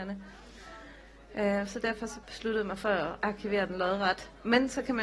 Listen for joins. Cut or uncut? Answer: cut